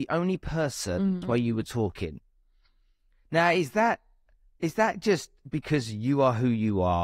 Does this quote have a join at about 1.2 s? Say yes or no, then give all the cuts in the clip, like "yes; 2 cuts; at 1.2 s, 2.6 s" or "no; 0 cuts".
yes; 1 cut; at 1.2 s